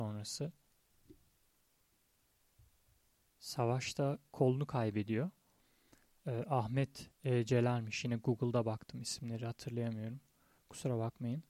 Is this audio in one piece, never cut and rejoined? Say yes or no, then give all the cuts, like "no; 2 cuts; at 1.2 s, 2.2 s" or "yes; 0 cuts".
yes; 0 cuts